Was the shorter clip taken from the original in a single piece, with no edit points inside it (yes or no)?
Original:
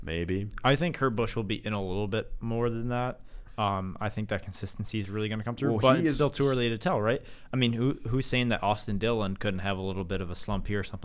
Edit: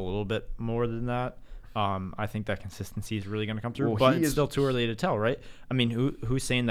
yes